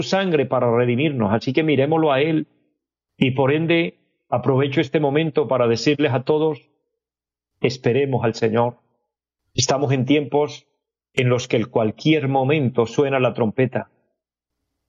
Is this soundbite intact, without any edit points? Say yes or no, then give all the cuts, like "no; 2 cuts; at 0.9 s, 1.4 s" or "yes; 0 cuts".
yes; 0 cuts